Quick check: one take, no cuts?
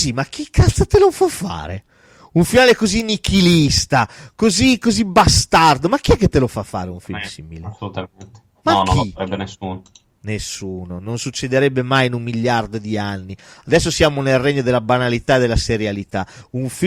yes; 0 cuts

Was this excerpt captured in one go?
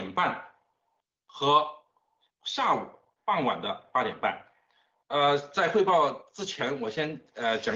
no; 1 cut; at 4.9 s

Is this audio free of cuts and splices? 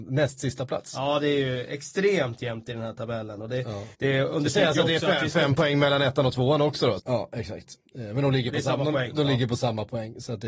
no; 2 cuts; at 3.9 s, 7.0 s

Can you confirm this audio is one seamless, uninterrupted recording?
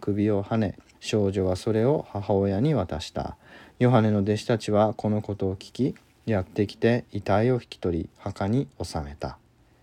no; 1 cut; at 0.9 s

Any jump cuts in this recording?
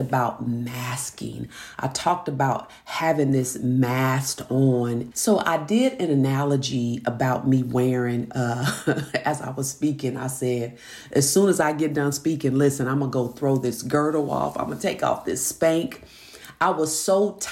yes; 1 cut; at 5.1 s

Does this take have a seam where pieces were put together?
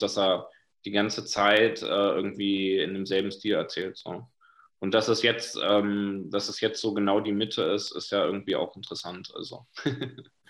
no; 0 cuts

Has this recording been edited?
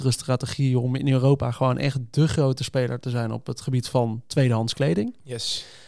no; 0 cuts

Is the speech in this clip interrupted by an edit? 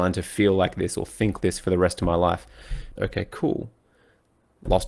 yes; 2 cuts; at 1.4 s, 3.0 s

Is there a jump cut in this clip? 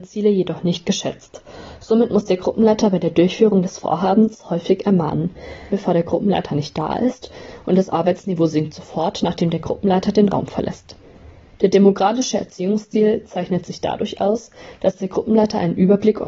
yes; 1 cut; at 5.7 s

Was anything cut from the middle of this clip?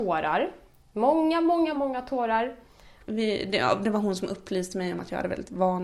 yes; 2 cuts; at 1.7 s, 3.0 s

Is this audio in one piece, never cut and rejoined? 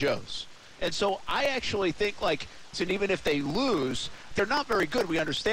no; 2 cuts; at 2.7 s, 4.3 s

